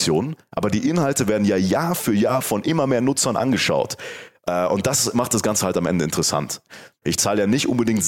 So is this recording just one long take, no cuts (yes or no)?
no